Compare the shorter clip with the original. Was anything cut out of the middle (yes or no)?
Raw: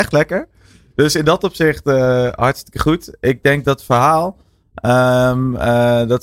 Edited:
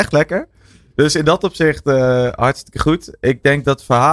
no